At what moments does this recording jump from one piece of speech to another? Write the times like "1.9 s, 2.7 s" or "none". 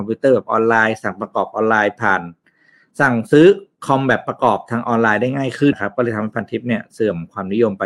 5.7 s